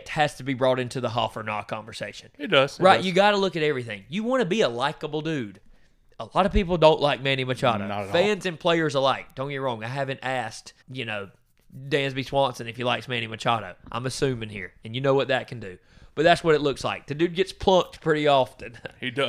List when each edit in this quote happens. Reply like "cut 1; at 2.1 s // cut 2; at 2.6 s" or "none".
cut 1; at 10.8 s